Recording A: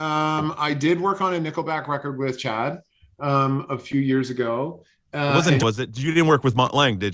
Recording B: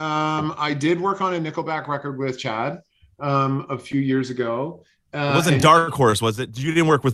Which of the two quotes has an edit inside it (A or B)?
A